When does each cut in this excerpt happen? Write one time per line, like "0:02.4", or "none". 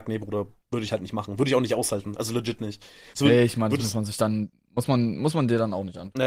0:03.1